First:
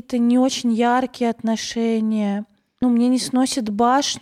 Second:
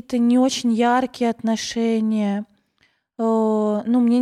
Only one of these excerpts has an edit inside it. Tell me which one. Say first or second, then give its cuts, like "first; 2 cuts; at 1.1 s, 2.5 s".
first; 1 cut; at 2.8 s